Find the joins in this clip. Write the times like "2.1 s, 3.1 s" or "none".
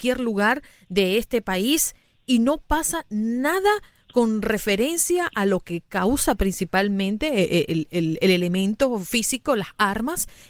none

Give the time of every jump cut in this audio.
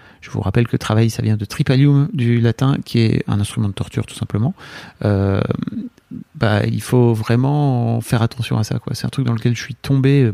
none

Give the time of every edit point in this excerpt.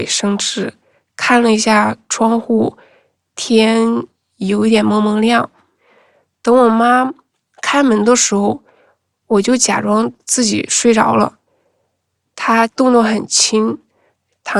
none

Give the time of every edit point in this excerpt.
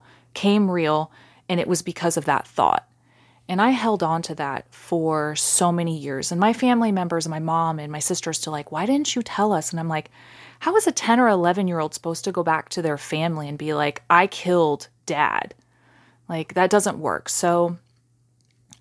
none

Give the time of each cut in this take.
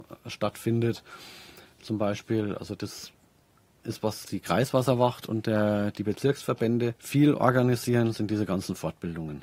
4.0 s, 7.0 s

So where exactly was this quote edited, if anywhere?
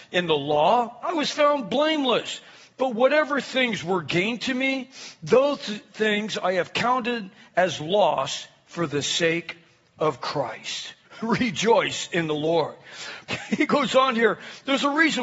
11.0 s, 13.3 s

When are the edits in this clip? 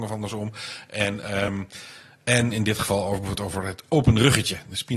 none

